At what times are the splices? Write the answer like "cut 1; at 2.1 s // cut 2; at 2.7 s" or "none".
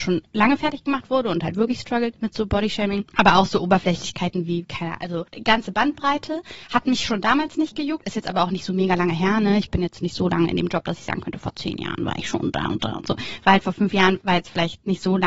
none